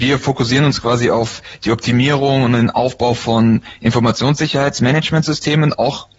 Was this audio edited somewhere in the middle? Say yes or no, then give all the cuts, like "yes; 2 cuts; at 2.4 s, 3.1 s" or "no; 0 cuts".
no; 0 cuts